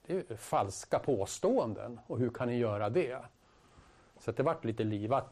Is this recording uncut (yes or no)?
yes